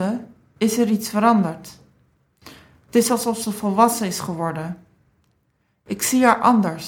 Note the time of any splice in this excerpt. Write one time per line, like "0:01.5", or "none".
none